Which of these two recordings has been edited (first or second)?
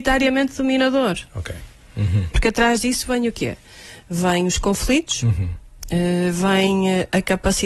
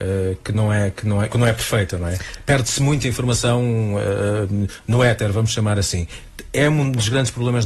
first